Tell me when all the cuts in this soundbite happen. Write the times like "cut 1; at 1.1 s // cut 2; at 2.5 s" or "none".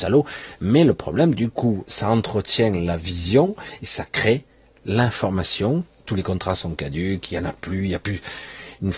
cut 1; at 6.0 s